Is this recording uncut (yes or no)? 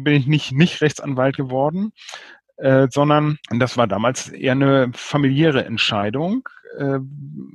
no